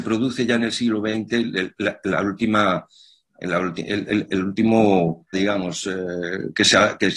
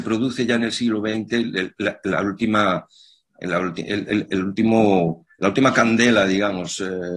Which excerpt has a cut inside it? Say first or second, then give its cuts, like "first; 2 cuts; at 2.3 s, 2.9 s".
first; 1 cut; at 5.3 s